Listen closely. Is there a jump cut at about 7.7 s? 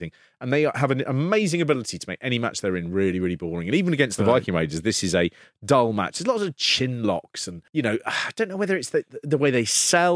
yes; 1 cut; at 7.7 s

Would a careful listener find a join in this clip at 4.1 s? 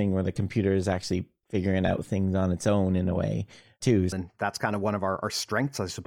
yes; 1 cut; at 4.1 s

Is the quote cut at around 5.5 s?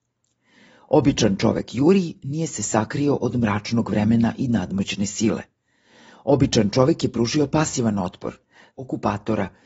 no; 1 cut; at 8.7 s

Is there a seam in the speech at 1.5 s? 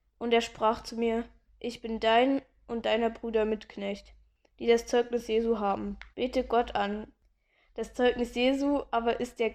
yes; 2 cuts; at 1.5 s, 6.1 s

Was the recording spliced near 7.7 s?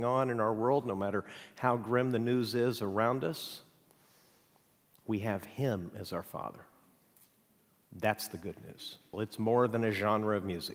no; 1 cut; at 9.1 s

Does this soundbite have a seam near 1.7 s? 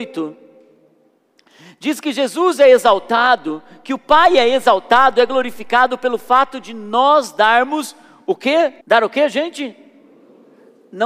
no; 1 cut; at 8.8 s

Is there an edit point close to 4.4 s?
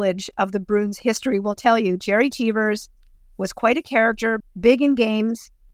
yes; 1 cut; at 4.4 s

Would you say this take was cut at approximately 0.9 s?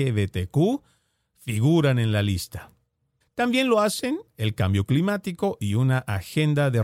no; 1 cut; at 3.2 s

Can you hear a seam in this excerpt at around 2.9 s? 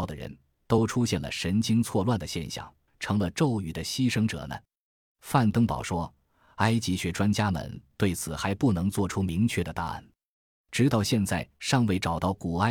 yes; 1 cut; at 2.9 s

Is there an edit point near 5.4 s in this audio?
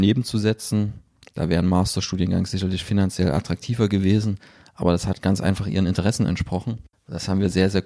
no; 1 cut; at 6.9 s

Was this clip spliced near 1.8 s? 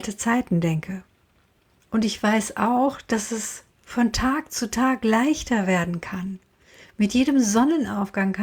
yes; 1 cut; at 1.8 s

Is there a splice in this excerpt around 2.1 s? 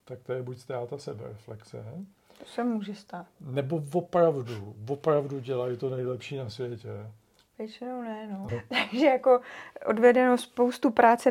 no; 3 cuts; at 3.4 s, 7.5 s, 8.5 s

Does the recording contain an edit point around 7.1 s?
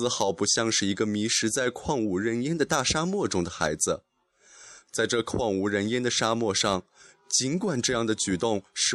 yes; 2 cuts; at 4.8 s, 7.1 s

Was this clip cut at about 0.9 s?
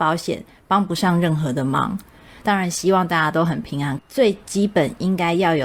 no; 2 cuts; at 2.4 s, 4.0 s

